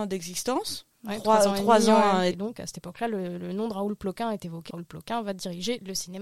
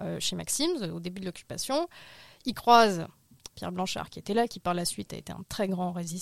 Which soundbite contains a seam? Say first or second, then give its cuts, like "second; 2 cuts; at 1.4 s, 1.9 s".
first; 2 cuts; at 2.3 s, 4.7 s